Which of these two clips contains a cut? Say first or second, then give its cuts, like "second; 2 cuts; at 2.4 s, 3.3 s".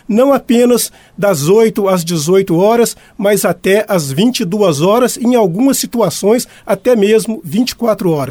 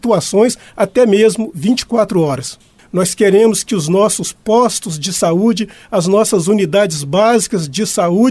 second; 1 cut; at 2.8 s